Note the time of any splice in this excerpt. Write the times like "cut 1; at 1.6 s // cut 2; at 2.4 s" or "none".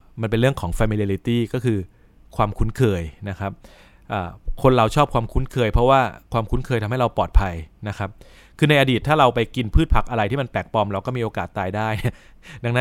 none